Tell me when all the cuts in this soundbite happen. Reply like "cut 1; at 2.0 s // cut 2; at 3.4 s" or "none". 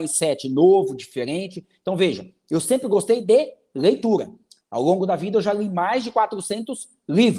none